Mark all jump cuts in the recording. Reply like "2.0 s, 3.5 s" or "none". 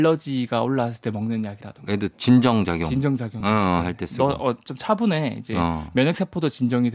none